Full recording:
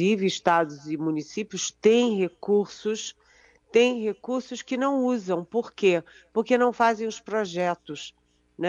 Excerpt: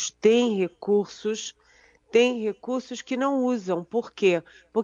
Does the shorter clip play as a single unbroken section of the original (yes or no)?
yes